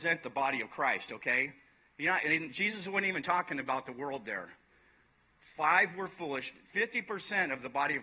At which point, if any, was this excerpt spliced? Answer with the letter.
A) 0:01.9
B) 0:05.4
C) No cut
C